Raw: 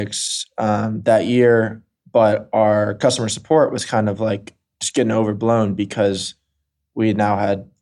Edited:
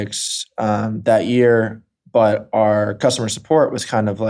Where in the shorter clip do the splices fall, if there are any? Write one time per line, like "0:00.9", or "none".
none